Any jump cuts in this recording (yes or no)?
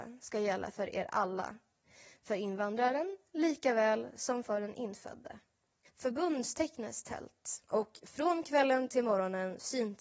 yes